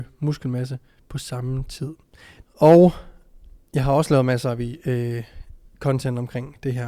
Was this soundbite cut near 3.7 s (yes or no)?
yes